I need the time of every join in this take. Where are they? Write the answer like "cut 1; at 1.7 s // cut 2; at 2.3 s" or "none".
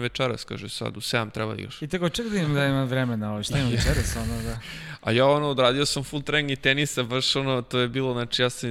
none